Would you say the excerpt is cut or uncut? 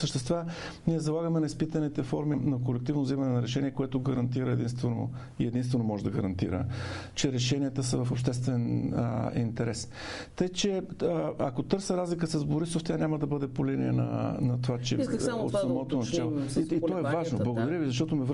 cut